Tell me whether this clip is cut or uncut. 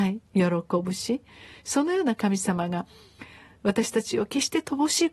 uncut